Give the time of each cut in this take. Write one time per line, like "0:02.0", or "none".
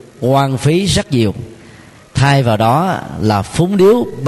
none